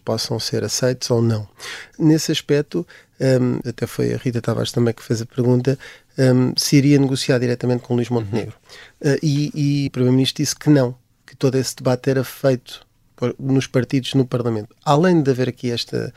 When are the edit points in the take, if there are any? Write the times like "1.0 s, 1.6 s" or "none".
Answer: 3.6 s, 9.9 s

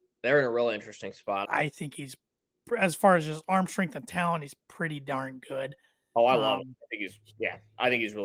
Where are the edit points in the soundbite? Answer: 1.4 s

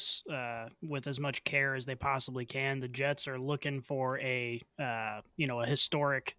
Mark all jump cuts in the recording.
none

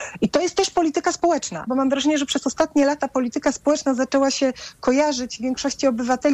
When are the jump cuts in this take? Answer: 1.7 s

